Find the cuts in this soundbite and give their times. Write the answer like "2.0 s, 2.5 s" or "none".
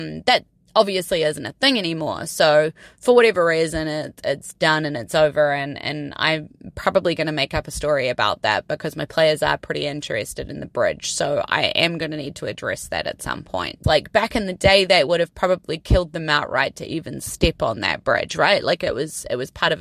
13.8 s